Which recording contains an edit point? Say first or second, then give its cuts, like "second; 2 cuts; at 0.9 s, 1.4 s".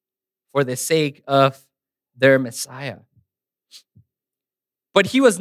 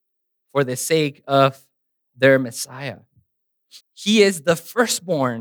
second; 1 cut; at 3.8 s